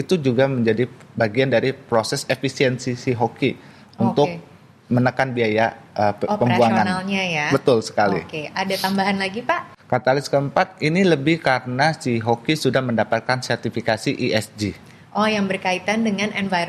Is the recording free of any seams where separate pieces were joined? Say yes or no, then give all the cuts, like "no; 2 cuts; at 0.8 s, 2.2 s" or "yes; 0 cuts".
yes; 0 cuts